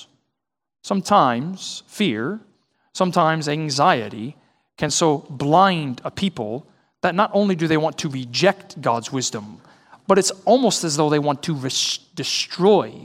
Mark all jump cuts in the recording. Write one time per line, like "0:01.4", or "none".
none